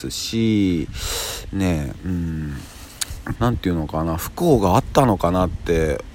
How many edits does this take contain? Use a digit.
1